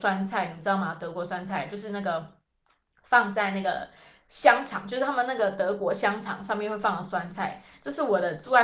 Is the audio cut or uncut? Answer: uncut